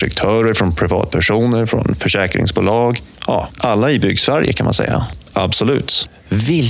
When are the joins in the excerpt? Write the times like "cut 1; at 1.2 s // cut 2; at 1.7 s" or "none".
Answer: cut 1; at 5.3 s